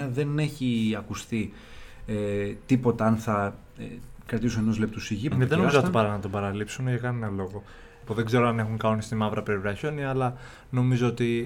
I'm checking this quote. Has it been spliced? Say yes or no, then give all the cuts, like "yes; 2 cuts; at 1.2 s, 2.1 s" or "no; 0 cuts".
yes; 2 cuts; at 5.3 s, 8.1 s